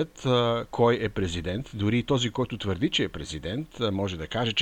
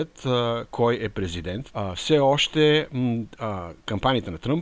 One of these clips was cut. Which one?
second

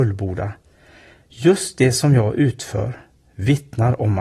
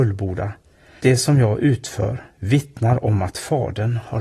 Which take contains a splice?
second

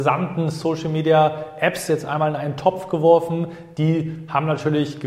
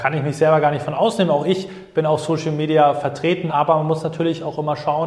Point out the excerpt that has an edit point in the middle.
second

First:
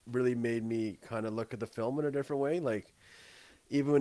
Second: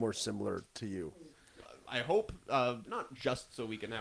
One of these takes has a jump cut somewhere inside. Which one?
second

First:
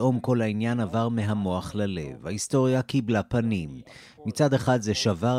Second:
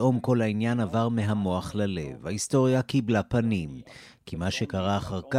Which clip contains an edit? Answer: second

